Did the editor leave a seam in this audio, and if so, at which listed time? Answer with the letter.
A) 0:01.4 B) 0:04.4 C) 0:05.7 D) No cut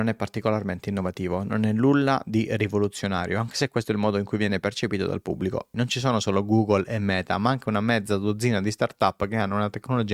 C